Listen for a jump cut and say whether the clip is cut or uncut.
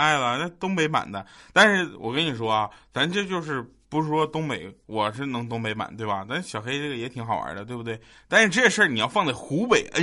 uncut